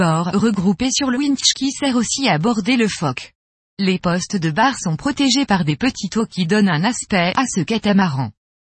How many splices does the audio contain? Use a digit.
2